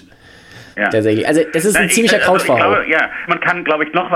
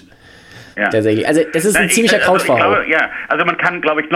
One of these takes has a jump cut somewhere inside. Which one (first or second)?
first